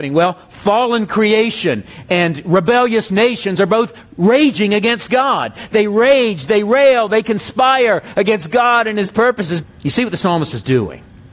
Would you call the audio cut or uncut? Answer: cut